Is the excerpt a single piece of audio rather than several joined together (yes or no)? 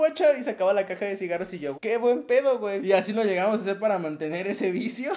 no